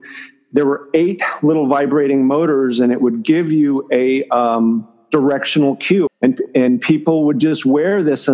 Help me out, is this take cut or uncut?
cut